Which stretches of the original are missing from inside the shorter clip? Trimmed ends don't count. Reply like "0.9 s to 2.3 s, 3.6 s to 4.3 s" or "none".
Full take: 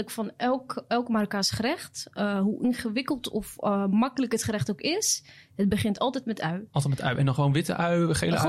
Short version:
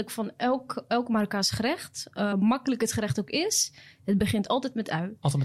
2.3 s to 3.8 s